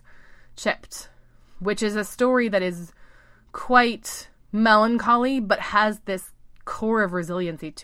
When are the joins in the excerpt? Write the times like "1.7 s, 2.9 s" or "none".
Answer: 4.4 s